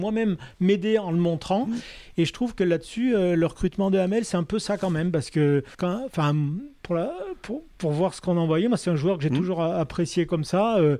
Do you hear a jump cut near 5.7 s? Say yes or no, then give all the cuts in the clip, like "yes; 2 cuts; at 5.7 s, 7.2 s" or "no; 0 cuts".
yes; 1 cut; at 5.7 s